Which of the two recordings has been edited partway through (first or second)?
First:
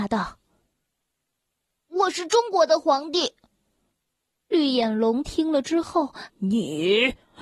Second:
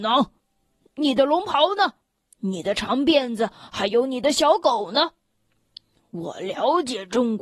first